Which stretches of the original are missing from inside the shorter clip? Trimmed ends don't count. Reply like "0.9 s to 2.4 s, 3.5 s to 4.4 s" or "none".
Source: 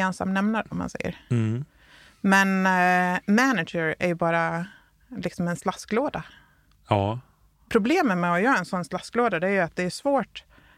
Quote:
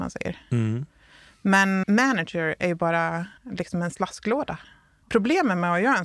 2.6 s to 3.2 s, 4.8 s to 5.0 s, 6.7 s to 7.6 s